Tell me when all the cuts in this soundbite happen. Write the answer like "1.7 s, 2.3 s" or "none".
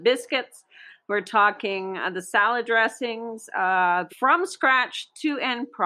4.1 s